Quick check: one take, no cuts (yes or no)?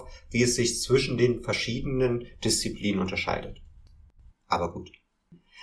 no